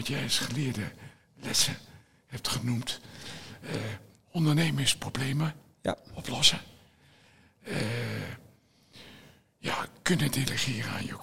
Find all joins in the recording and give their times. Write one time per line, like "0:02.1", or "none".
none